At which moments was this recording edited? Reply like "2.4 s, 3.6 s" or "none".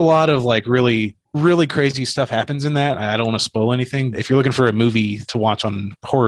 4.1 s, 5.3 s